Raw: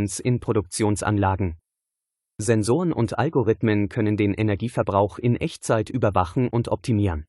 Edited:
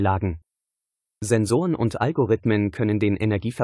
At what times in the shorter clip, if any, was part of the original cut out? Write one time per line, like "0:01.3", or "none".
none